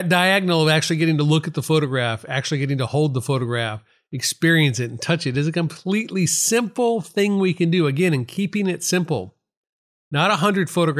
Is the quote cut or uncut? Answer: uncut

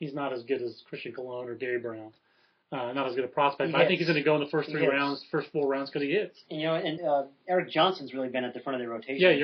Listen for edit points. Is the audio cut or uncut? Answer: cut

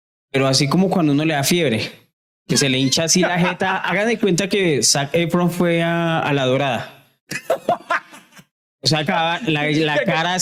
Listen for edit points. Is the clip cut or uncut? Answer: cut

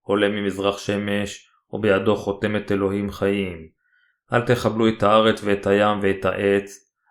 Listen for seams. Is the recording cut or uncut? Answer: cut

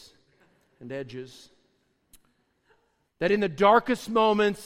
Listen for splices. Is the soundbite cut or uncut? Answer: cut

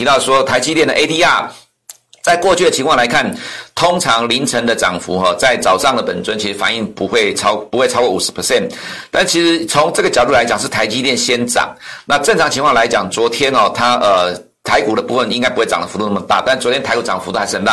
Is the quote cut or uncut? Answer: uncut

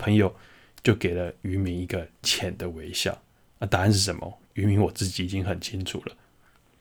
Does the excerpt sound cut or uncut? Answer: cut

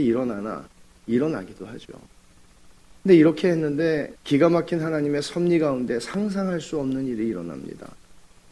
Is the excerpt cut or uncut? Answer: uncut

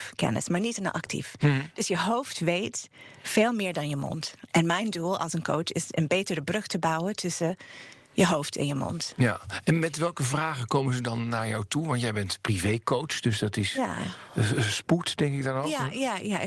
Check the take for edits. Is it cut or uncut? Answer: uncut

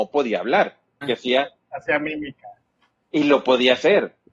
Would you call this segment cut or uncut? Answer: cut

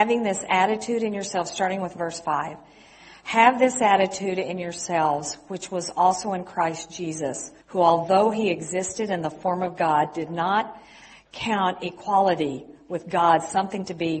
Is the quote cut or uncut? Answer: cut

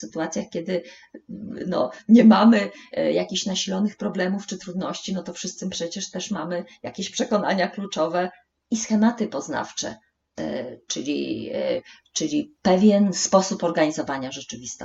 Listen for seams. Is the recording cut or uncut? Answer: uncut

